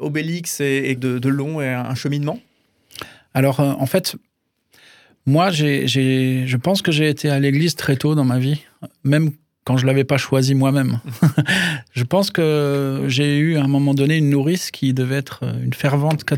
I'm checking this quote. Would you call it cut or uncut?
cut